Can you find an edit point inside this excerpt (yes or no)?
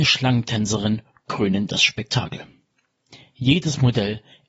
no